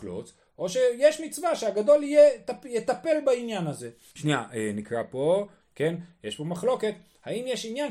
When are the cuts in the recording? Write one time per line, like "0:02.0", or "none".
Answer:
0:04.1
0:05.6